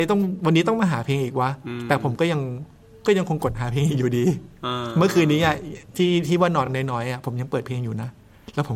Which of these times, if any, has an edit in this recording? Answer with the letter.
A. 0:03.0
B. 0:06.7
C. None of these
C